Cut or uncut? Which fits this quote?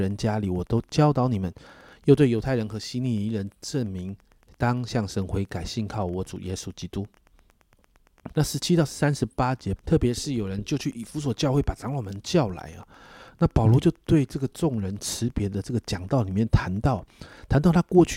cut